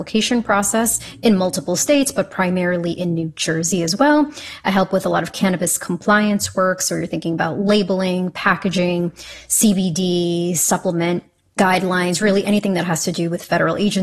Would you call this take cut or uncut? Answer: uncut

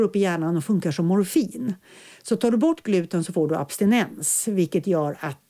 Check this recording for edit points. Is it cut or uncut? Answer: uncut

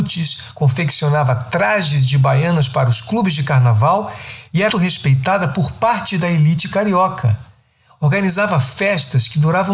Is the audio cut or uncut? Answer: cut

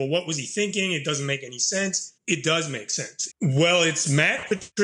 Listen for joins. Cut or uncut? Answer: cut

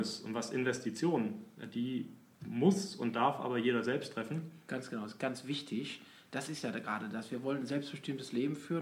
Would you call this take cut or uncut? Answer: uncut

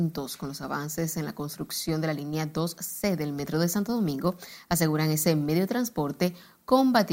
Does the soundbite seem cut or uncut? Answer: uncut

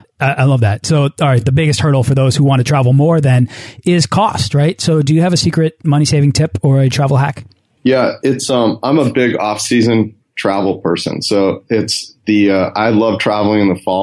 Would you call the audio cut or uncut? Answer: uncut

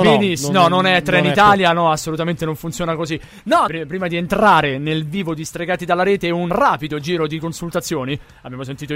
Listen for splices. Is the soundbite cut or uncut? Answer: cut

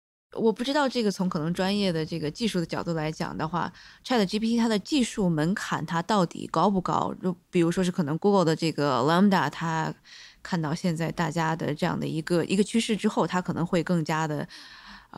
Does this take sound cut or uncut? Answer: uncut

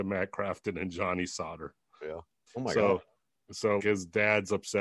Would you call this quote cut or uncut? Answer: cut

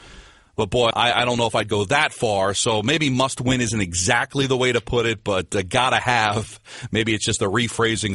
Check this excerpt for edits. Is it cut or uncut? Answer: cut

